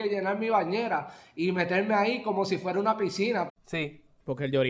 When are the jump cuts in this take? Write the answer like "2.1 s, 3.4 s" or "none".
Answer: 3.5 s